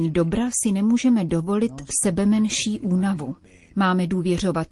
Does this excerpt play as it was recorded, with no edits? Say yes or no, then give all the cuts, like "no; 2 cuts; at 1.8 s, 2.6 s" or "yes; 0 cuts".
yes; 0 cuts